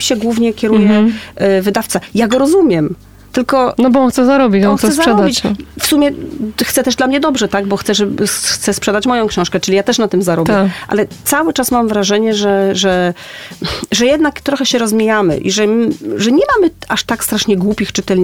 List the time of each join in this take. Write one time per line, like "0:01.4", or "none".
none